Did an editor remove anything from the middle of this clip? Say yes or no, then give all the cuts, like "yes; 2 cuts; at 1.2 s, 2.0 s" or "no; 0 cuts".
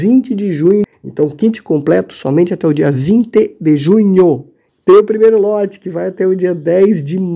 yes; 1 cut; at 0.9 s